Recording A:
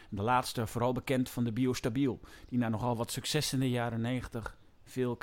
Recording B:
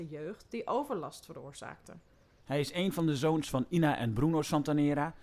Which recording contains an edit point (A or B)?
B